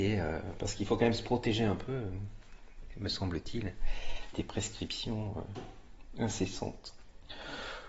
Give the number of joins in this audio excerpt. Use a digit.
1